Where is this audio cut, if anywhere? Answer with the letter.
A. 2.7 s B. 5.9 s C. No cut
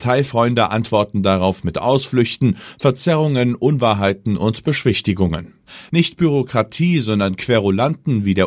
B